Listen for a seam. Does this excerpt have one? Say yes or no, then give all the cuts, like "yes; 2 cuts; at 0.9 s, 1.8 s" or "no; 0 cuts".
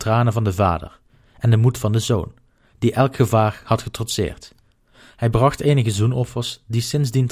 yes; 1 cut; at 4.8 s